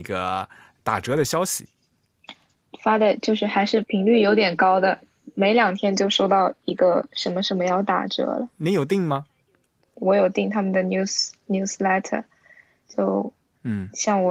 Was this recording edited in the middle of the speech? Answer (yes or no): yes